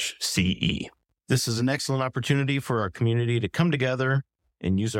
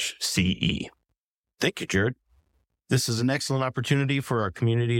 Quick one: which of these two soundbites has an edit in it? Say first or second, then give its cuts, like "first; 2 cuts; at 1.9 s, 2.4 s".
first; 1 cut; at 1.2 s